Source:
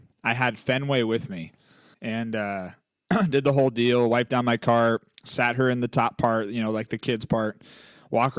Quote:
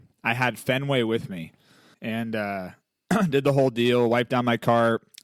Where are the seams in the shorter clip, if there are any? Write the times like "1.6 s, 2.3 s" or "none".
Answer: none